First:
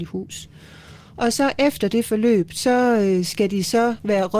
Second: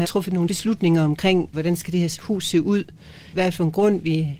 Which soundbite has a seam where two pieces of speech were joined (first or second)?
second